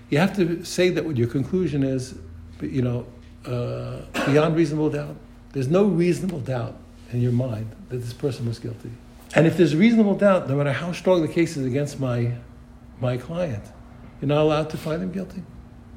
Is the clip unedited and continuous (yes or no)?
no